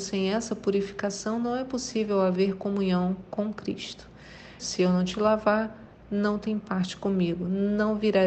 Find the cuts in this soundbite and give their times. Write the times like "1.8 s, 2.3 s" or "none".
4.6 s

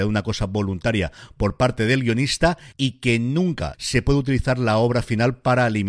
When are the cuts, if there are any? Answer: 3.7 s

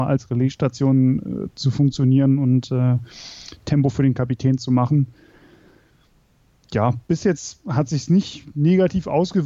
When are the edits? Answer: none

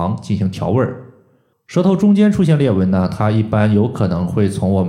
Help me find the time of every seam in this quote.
1.5 s

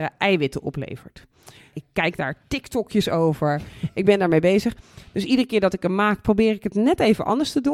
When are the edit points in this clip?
1.7 s

